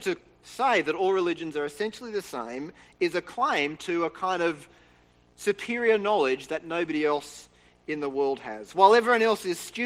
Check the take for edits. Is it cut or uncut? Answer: uncut